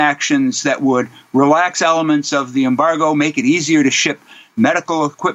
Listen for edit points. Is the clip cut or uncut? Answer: uncut